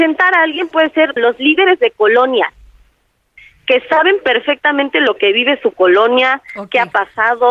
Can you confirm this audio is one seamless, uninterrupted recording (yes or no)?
no